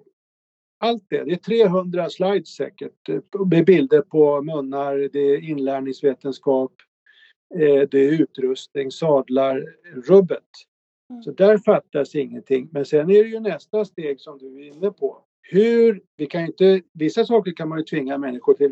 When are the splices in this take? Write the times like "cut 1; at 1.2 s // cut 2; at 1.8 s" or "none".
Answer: cut 1; at 7.9 s // cut 2; at 15.3 s